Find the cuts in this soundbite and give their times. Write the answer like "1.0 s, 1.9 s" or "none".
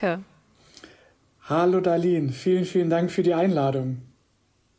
none